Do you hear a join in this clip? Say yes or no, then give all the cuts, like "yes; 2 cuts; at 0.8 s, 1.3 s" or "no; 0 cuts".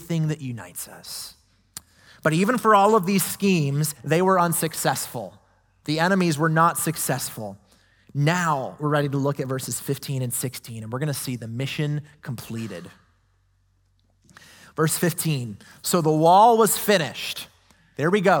yes; 1 cut; at 3.9 s